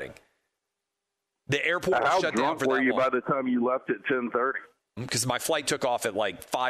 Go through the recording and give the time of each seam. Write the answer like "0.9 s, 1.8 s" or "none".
5.0 s